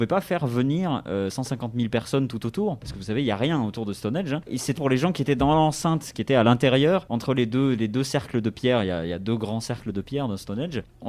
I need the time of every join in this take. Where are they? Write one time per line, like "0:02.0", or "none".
0:04.8